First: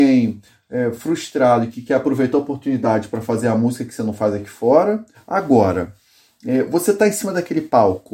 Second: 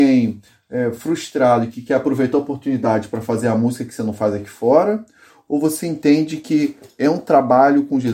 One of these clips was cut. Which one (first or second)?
first